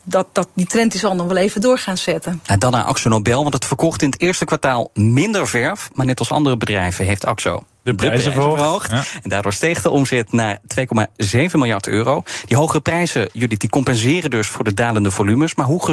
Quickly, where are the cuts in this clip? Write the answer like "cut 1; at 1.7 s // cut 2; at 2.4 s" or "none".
none